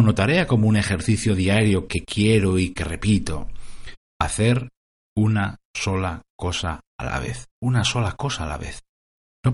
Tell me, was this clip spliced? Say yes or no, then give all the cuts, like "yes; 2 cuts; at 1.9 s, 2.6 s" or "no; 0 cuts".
yes; 2 cuts; at 4.0 s, 7.5 s